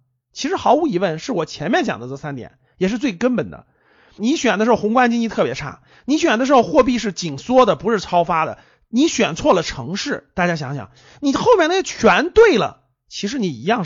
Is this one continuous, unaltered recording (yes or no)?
no